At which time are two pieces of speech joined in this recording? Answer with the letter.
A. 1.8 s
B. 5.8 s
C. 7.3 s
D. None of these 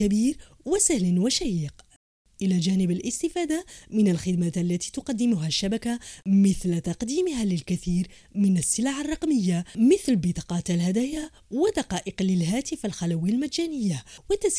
D